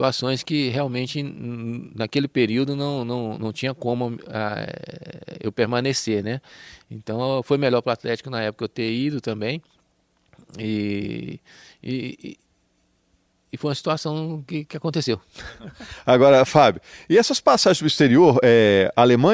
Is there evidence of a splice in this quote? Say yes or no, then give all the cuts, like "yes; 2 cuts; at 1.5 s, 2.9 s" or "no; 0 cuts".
no; 0 cuts